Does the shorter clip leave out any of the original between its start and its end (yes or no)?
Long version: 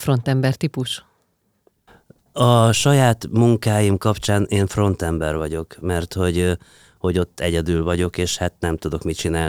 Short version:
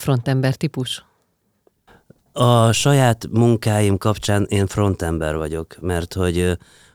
no